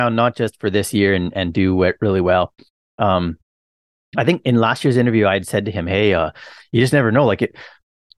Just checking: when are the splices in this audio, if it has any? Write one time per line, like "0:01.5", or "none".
none

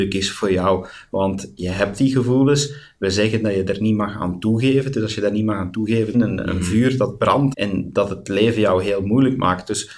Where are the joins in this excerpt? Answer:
0:06.1
0:07.5

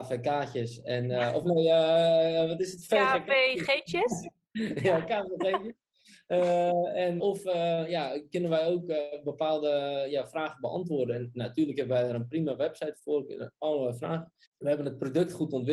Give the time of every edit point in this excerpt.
0:07.2
0:14.4

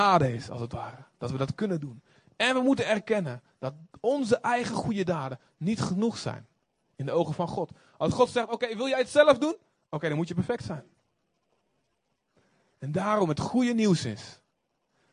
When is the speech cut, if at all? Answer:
none

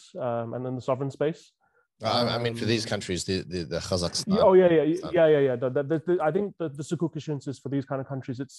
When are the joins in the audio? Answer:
none

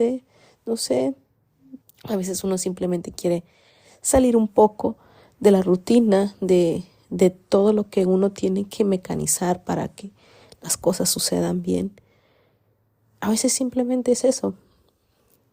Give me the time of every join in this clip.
0:01.8

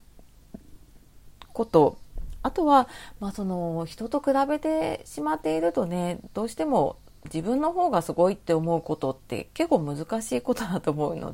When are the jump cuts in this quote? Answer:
0:07.2

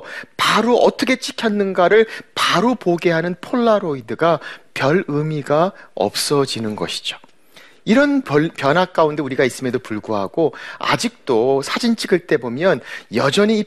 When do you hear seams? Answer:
none

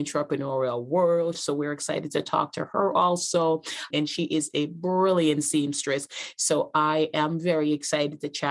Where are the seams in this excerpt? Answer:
0:01.3
0:03.9

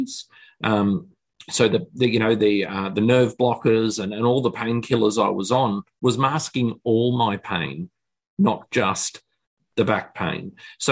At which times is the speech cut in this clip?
none

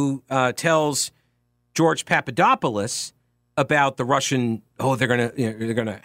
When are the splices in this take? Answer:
none

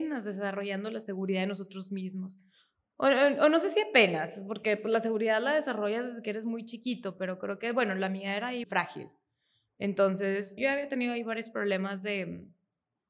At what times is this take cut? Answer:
0:08.6
0:10.6

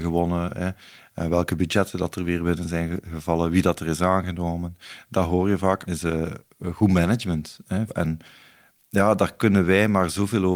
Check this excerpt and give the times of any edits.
0:05.9
0:07.9

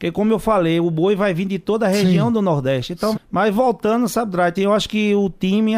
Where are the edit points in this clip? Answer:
0:03.1
0:04.6

